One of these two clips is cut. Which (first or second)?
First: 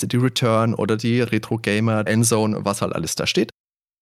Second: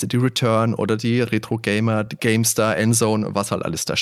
first